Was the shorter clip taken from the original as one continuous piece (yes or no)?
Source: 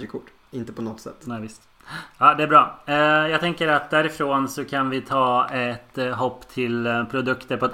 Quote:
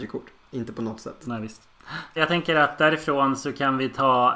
no